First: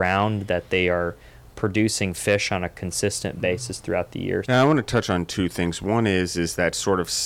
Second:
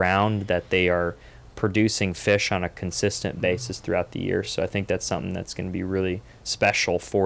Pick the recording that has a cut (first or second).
first